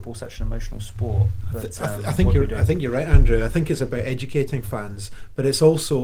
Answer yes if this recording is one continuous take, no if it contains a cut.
yes